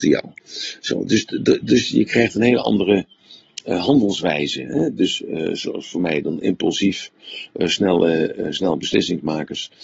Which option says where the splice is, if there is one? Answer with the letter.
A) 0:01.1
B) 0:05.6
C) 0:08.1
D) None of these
D